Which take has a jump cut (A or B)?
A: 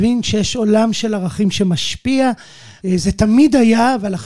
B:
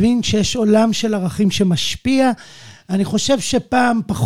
A